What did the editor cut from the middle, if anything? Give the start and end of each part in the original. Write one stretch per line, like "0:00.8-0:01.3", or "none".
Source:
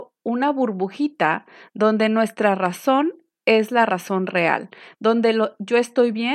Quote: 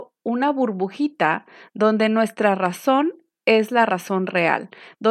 none